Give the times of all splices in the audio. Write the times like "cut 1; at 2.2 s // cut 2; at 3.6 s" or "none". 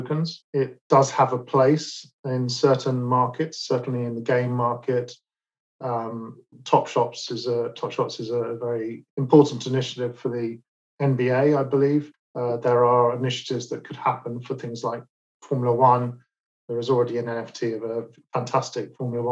none